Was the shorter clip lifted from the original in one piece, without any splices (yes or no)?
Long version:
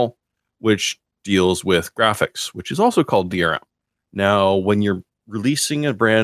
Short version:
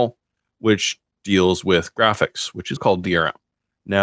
no